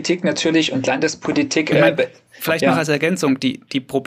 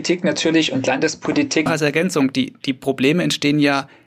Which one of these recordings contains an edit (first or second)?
second